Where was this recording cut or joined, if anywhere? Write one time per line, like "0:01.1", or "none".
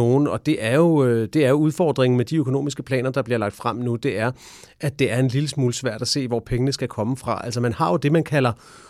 none

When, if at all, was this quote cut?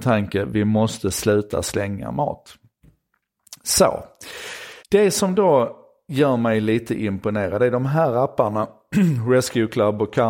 0:04.8

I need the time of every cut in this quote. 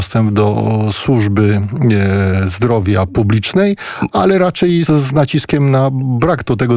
0:04.9

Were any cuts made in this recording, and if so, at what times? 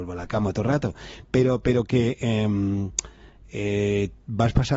none

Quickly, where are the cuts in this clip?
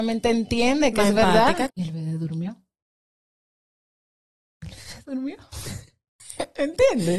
0:01.7

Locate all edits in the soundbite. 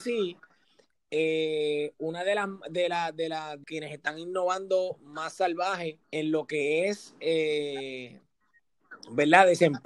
0:03.6
0:06.0

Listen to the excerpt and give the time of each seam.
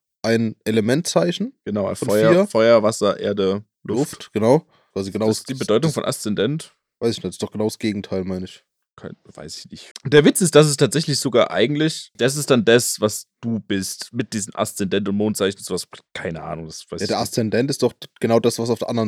0:04.9
0:09.9
0:12.1

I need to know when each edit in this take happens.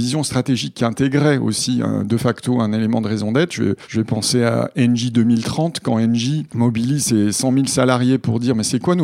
none

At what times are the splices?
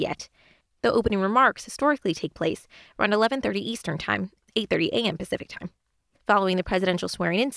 0:06.1

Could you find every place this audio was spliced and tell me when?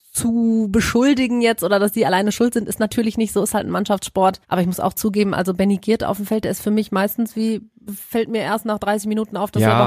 0:04.4

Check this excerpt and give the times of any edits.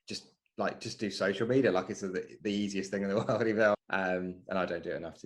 0:03.7

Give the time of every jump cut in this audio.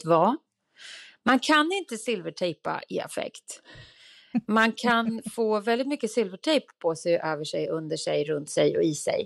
none

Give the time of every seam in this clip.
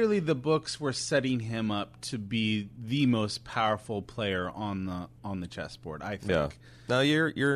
none

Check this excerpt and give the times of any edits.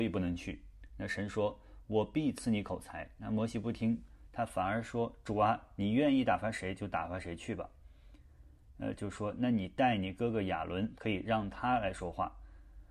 0:09.0
0:11.0

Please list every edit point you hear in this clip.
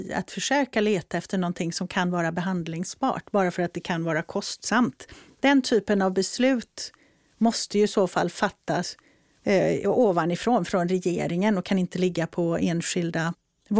none

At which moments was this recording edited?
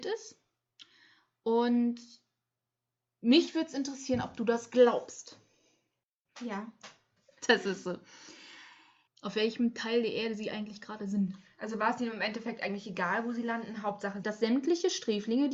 0:07.2
0:09.1
0:14.2

